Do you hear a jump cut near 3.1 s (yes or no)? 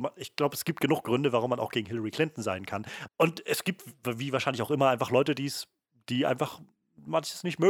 yes